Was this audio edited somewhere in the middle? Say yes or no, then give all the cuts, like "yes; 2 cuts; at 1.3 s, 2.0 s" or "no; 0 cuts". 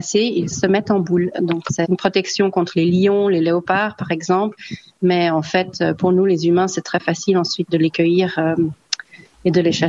no; 0 cuts